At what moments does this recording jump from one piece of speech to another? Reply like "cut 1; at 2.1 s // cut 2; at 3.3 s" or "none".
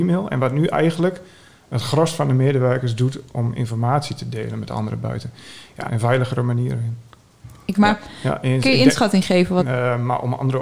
cut 1; at 5.9 s // cut 2; at 7.8 s // cut 3; at 9.6 s